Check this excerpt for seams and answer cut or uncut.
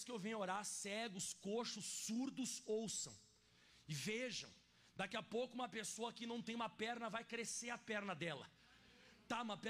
uncut